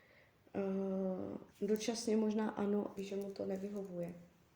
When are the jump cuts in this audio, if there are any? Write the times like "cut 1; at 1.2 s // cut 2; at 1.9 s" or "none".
cut 1; at 1.5 s // cut 2; at 3.0 s

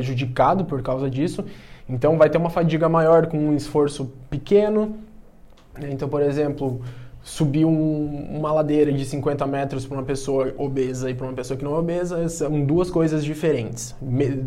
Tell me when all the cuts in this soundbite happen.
none

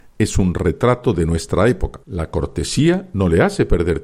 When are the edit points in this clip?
cut 1; at 2.0 s

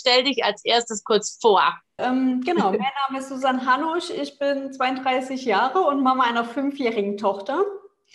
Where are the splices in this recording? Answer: cut 1; at 2.0 s

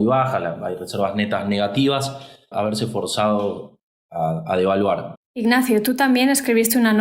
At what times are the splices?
cut 1; at 2.5 s // cut 2; at 5.2 s

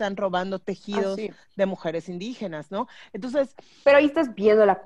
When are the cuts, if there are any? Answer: none

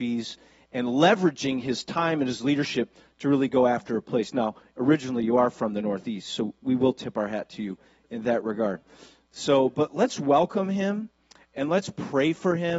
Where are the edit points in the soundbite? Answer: none

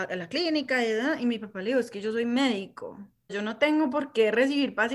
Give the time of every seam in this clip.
cut 1; at 3.3 s

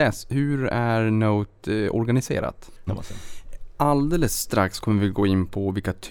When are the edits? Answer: cut 1; at 2.9 s

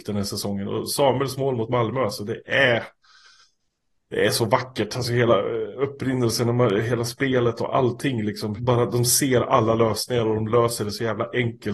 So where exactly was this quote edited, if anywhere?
cut 1; at 8.6 s

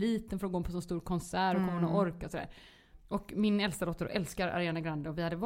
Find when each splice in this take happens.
cut 1; at 3.0 s

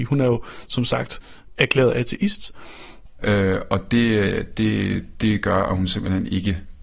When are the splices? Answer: cut 1; at 3.2 s

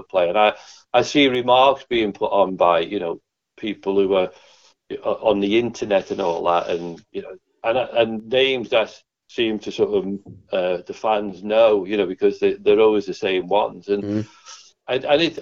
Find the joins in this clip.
none

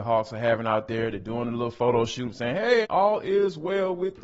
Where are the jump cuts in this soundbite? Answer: cut 1; at 2.8 s

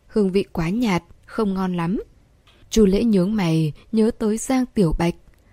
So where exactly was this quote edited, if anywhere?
cut 1; at 2.6 s

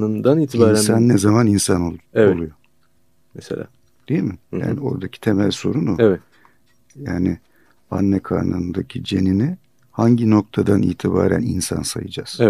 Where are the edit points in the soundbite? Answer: none

